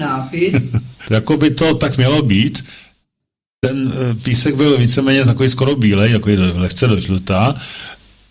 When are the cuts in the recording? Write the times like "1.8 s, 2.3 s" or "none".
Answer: 1.0 s